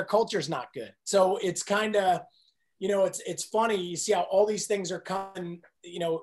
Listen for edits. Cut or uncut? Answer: uncut